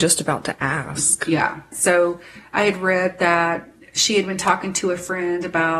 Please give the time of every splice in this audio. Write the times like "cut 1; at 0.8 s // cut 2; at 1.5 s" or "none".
cut 1; at 1.7 s